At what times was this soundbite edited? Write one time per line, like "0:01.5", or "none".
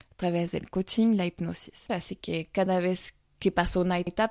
0:01.9